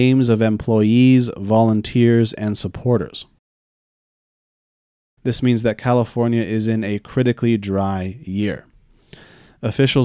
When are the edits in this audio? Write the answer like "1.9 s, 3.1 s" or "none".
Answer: 5.2 s